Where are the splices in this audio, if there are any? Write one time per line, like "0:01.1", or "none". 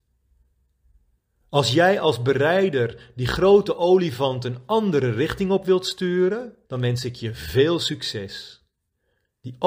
0:06.7